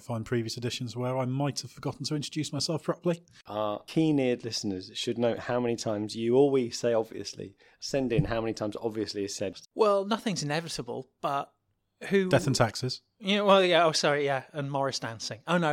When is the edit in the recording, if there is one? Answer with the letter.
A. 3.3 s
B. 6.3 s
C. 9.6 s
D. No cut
C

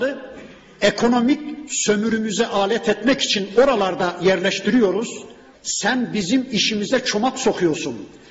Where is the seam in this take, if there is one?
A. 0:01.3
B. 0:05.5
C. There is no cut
B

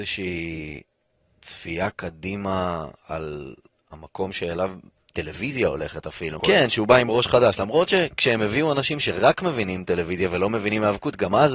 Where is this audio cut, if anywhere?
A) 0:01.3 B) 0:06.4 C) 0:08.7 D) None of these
B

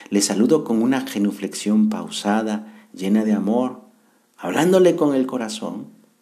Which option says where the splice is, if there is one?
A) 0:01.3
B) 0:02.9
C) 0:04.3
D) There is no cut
D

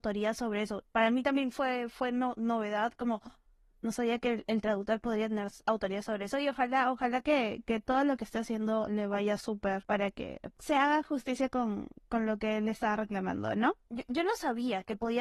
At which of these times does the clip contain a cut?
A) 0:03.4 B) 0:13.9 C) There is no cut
B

